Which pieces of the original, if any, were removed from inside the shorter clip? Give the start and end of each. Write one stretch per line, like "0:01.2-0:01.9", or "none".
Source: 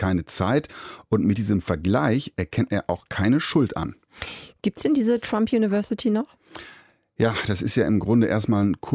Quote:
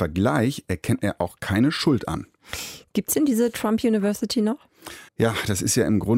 0:06.8-0:07.1